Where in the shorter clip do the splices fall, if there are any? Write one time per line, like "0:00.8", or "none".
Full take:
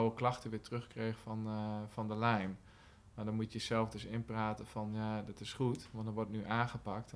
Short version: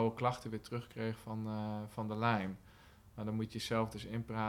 none